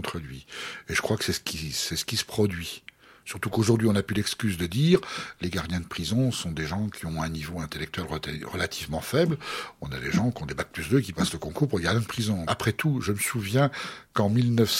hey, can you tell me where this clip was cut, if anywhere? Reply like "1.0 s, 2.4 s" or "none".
12.5 s